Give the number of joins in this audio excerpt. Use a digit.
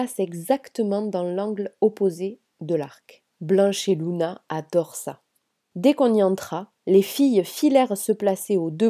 2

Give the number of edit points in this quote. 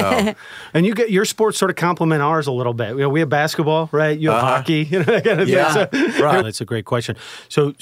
1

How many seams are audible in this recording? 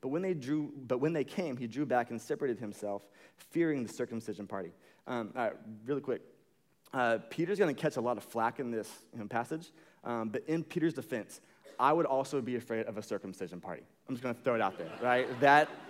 0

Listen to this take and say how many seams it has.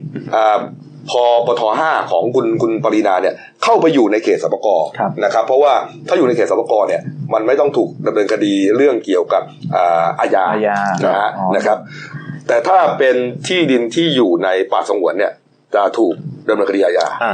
0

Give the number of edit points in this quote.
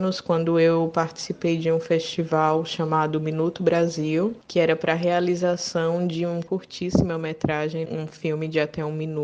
0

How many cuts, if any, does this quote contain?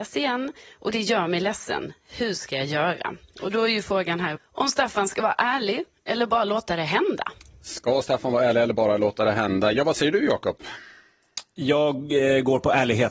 1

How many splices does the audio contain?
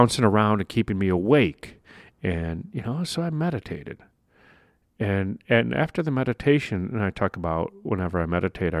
0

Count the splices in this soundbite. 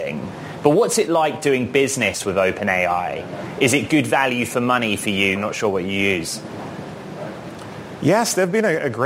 1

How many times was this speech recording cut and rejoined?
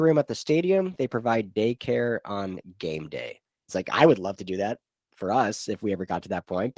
1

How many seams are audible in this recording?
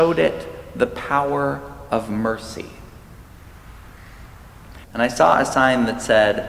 1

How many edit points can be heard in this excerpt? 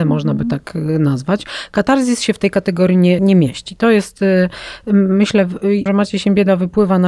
2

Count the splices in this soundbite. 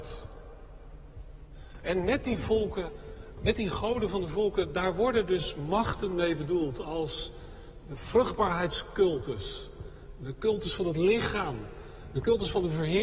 1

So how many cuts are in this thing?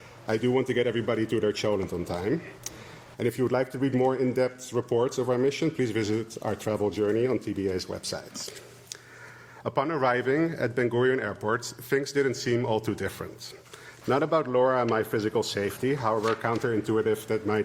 2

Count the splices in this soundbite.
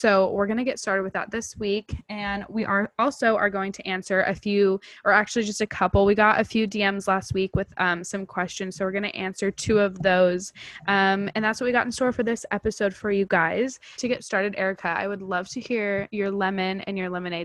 1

